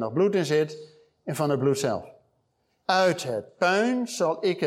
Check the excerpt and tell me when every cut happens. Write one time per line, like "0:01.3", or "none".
0:02.8